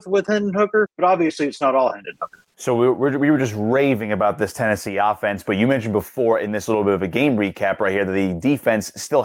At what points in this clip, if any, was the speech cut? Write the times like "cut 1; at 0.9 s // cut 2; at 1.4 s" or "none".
none